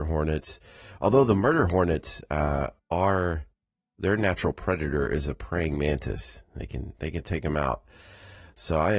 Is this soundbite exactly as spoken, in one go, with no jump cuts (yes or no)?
yes